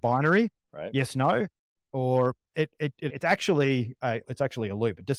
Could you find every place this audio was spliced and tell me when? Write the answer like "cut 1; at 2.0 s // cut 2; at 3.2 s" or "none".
cut 1; at 3.1 s // cut 2; at 4.2 s